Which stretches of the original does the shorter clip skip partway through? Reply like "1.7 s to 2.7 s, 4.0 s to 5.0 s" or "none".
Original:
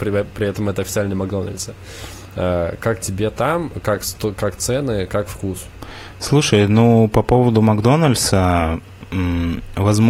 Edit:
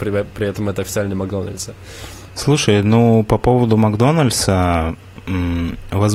2.3 s to 6.1 s